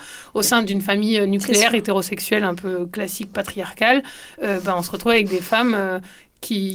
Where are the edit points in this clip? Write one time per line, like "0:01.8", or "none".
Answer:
none